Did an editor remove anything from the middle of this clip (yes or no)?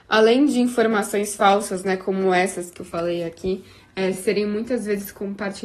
no